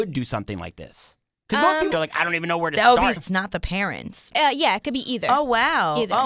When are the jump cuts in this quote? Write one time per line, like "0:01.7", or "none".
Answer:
0:01.9
0:03.2